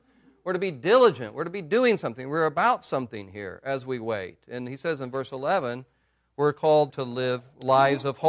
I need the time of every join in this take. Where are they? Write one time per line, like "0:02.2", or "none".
0:06.9